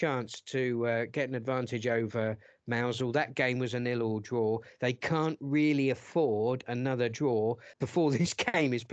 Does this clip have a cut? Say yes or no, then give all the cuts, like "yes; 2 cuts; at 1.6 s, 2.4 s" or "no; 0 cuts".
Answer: yes; 1 cut; at 7.7 s